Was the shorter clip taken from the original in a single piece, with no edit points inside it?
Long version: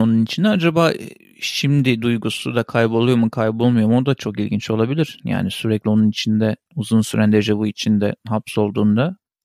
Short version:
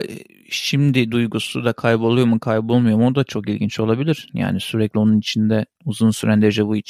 yes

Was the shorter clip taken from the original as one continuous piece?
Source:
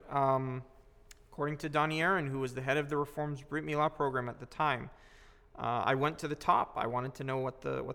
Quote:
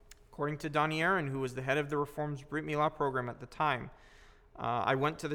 yes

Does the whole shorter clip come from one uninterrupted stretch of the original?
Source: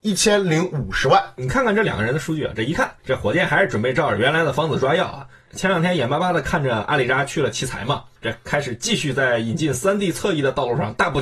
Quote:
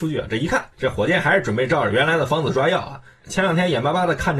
yes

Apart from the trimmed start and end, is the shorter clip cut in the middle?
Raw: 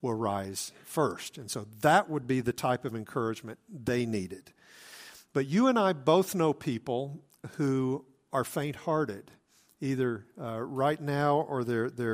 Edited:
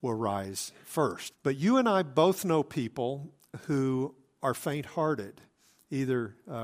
yes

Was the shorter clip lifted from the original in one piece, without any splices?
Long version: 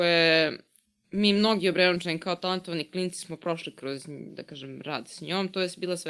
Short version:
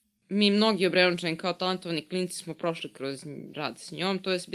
no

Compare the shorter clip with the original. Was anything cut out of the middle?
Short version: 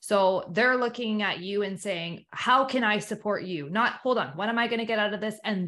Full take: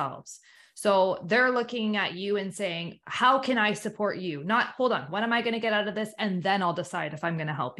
no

